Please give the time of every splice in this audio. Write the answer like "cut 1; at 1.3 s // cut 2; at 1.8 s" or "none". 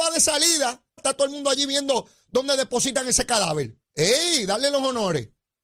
cut 1; at 1.0 s // cut 2; at 3.8 s